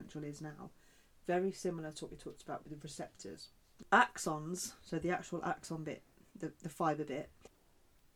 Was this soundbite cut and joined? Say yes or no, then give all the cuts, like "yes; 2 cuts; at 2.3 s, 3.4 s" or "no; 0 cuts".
no; 0 cuts